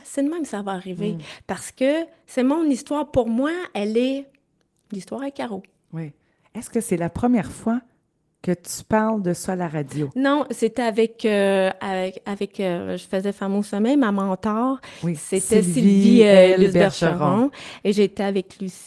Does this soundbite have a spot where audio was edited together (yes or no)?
no